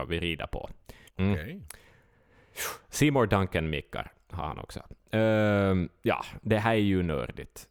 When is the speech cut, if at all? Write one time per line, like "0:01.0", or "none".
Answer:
0:01.1